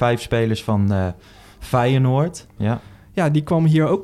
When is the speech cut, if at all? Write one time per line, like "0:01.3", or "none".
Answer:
0:02.6